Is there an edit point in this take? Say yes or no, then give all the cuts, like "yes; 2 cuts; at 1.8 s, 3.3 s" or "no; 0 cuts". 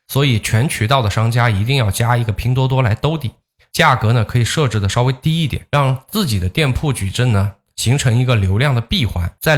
no; 0 cuts